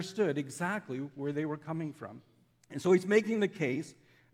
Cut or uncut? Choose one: cut